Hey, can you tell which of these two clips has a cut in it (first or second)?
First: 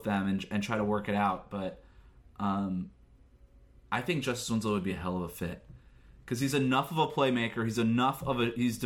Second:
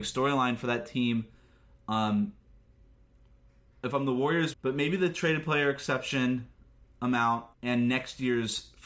second